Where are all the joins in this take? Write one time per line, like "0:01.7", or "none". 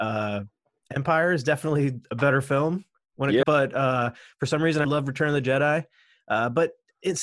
0:03.4
0:04.8